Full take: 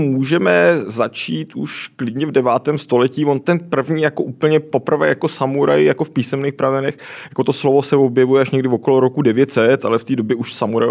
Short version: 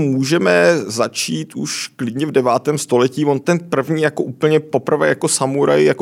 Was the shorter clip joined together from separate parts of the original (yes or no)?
no